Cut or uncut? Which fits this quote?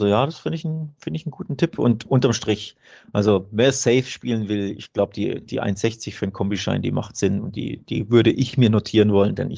uncut